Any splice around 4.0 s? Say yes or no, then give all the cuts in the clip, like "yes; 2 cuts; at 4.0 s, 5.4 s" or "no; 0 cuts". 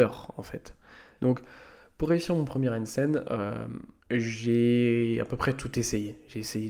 yes; 2 cuts; at 1.2 s, 4.0 s